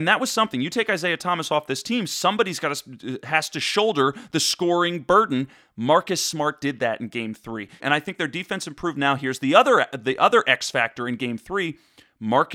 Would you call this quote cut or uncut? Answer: cut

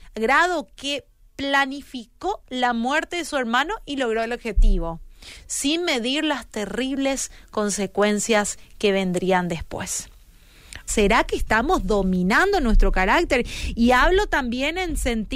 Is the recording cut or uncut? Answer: cut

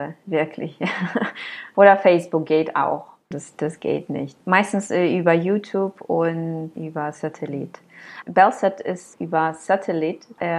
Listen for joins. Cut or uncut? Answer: cut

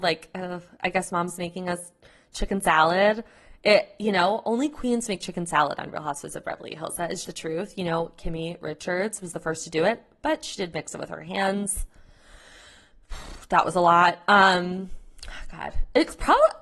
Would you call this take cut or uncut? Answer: cut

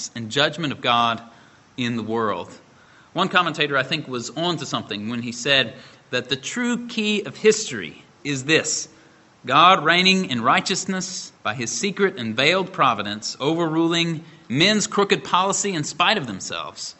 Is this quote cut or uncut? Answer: cut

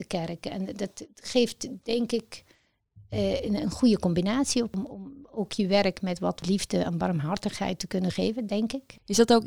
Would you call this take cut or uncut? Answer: uncut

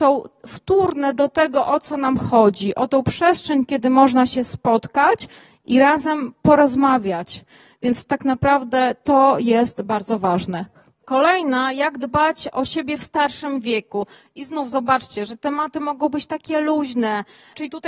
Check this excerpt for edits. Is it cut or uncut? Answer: uncut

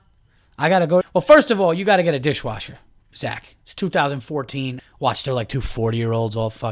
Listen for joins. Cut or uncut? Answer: cut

